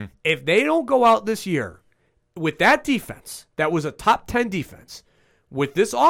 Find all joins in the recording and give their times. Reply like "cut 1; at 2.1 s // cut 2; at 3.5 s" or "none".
none